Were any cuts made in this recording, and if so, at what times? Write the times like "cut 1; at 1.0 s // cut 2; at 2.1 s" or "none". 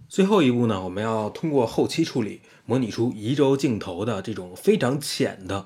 none